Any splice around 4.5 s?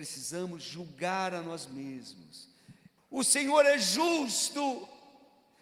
no; 1 cut; at 3.0 s

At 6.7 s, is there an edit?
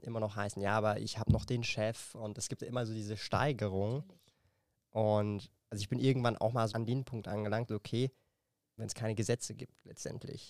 yes; 2 cuts; at 6.7 s, 8.8 s

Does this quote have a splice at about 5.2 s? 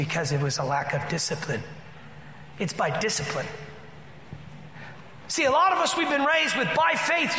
no; 1 cut; at 2.5 s

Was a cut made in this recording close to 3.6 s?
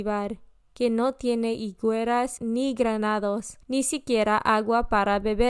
yes; 2 cuts; at 2.4 s, 3.6 s

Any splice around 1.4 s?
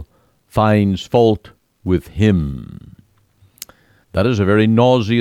no; 1 cut; at 4.0 s

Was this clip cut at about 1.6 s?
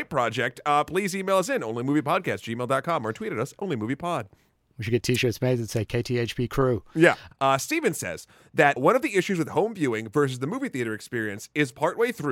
no; 2 cuts; at 7.3 s, 8.8 s

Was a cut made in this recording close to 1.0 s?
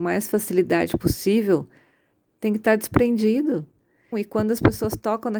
no; 2 cuts; at 2.3 s, 4.1 s

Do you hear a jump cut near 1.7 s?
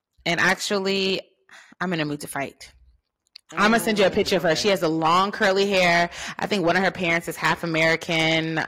yes; 2 cuts; at 1.7 s, 3.4 s

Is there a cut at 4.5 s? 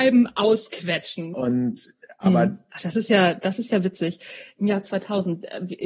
no; 2 cuts; at 1.3 s, 2.7 s

